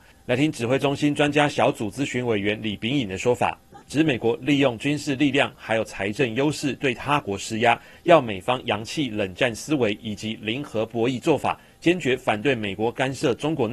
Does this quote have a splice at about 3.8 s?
yes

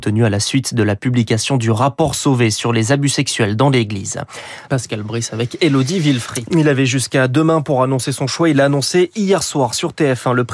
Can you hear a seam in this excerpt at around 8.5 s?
no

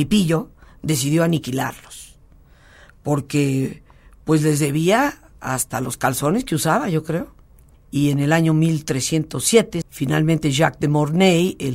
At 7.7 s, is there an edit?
yes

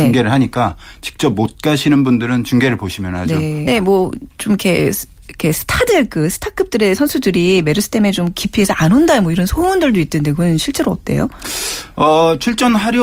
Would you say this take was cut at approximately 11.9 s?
no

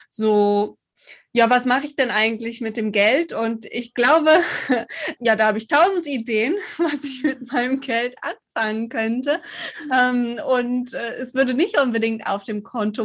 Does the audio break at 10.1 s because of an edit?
no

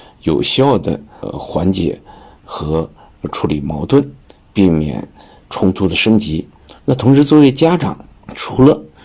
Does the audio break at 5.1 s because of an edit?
no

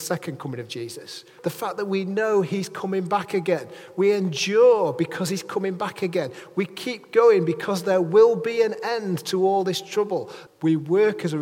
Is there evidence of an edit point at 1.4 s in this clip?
yes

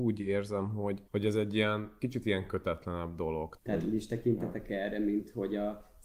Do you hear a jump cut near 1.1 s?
yes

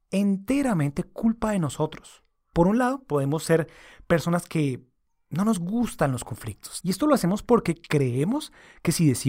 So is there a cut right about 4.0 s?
no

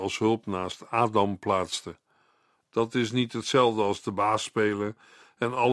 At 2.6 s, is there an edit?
yes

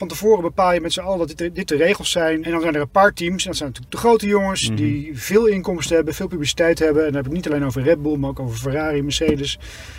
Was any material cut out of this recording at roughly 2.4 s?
yes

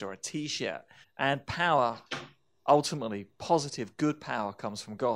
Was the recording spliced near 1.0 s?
yes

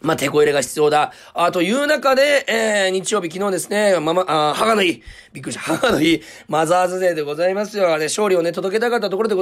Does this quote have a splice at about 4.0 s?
no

